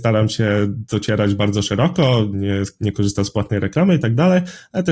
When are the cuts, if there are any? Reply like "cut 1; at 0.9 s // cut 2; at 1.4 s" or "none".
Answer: cut 1; at 2.3 s